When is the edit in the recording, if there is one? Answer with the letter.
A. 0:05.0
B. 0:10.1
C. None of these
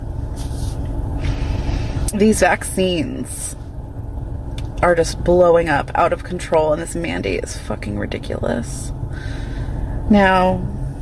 B